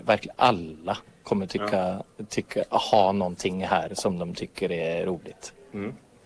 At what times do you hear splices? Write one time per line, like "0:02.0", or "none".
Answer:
none